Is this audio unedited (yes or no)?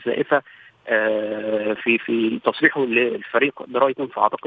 no